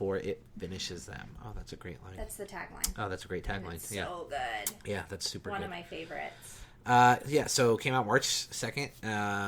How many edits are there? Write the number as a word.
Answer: zero